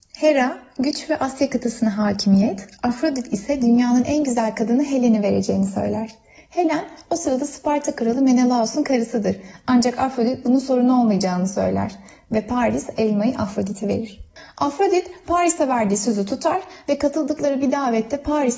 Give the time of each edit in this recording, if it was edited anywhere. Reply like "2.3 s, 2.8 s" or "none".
none